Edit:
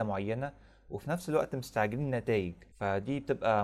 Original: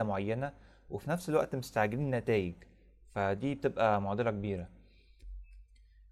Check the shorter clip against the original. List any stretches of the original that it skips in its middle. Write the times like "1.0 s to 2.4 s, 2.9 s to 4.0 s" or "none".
2.7 s to 3.1 s